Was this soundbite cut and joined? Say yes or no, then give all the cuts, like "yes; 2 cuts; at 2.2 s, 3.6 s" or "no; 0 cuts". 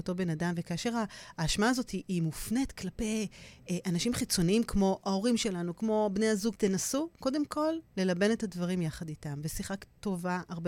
yes; 1 cut; at 6.5 s